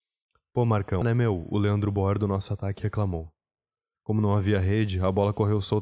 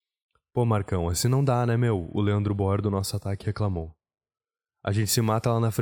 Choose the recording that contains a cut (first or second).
first